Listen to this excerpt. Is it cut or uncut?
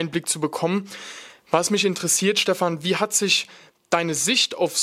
uncut